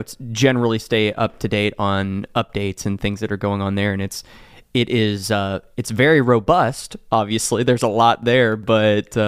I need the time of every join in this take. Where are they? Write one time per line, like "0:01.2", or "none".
none